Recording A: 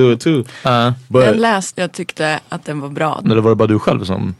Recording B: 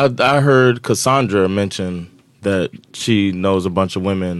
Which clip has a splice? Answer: A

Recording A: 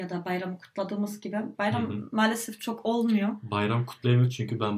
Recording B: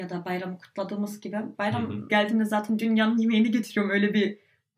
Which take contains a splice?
B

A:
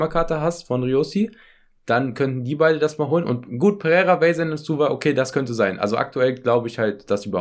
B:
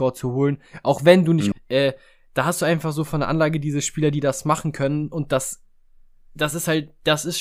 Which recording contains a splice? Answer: B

